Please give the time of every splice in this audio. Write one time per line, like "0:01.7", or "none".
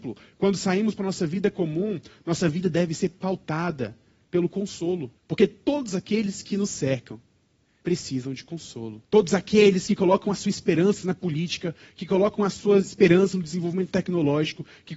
0:05.2
0:07.8
0:09.0